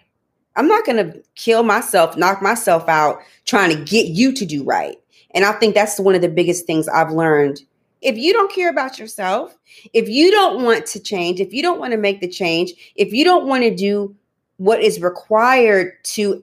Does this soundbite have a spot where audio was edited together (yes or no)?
yes